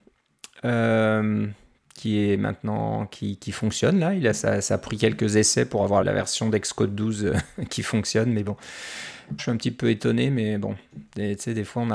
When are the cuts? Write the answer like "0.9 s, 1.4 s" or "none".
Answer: 6.0 s, 9.4 s